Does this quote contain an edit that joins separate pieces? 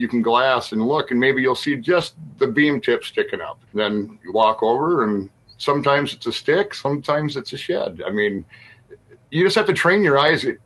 yes; 1 cut; at 3.7 s

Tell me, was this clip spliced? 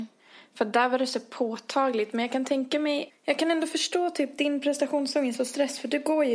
yes; 1 cut; at 3.1 s

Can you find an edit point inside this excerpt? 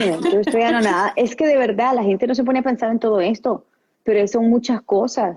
no; 0 cuts

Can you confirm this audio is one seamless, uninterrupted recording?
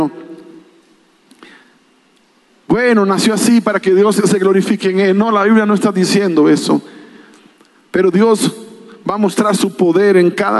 yes; 0 cuts

